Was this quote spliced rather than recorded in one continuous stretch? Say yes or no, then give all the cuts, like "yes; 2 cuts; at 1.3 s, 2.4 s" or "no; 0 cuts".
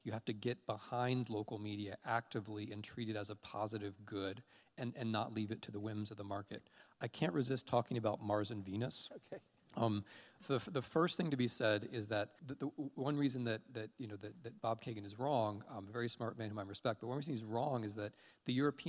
yes; 2 cuts; at 10.4 s, 12.4 s